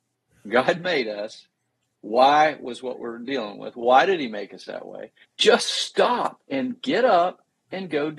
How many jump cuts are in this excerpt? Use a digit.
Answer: 2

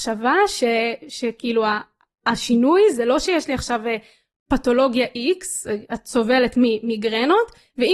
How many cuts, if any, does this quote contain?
0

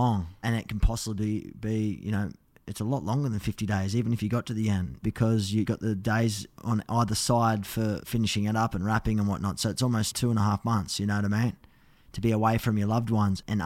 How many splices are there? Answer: 0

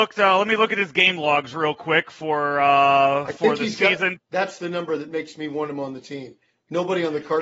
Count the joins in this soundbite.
1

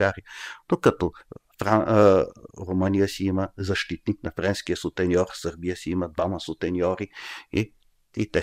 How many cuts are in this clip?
0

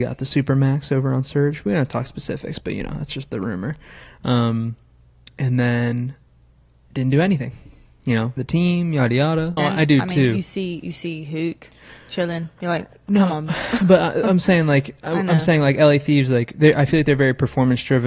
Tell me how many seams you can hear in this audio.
2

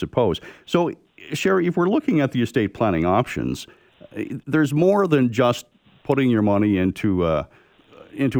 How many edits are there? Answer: 0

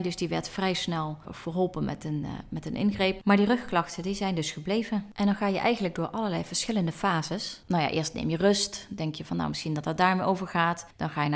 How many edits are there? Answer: 0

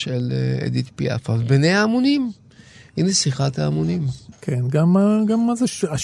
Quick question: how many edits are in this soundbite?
1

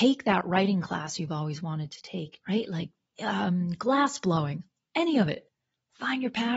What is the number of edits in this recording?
1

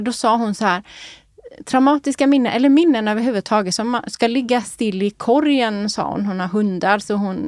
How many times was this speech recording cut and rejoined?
0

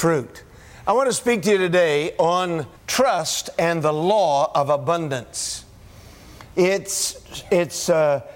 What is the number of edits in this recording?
2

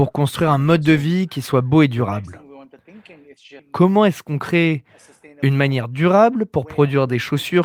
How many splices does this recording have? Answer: 1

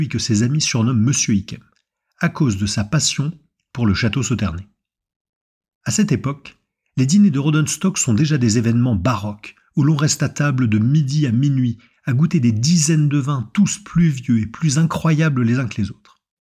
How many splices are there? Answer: 0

